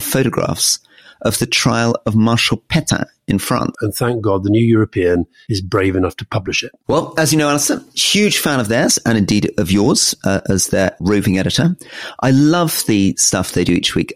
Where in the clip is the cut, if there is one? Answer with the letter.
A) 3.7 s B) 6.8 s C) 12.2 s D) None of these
A